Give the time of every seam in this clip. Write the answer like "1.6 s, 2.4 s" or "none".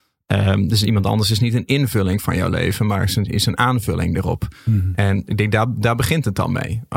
none